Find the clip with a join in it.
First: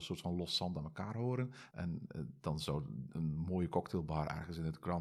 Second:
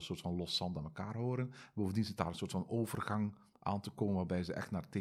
first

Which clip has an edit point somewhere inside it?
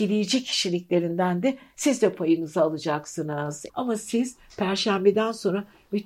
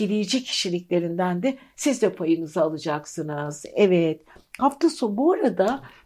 first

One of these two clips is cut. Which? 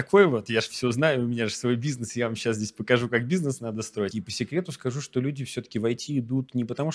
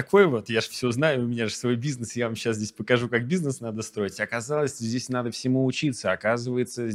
first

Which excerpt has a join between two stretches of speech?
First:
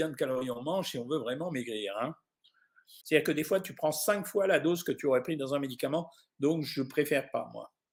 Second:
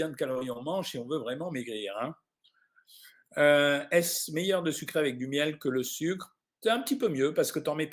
first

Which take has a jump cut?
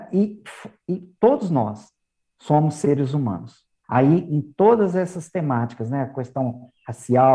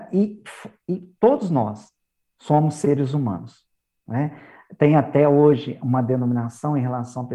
first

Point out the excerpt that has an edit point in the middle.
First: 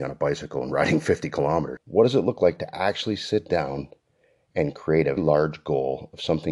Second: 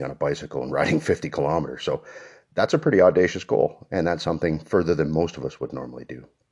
first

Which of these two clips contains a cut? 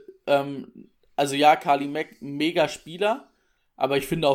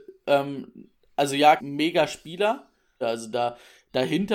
second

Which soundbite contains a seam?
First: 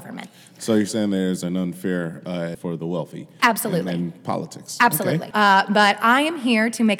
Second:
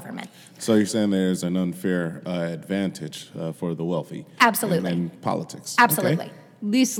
first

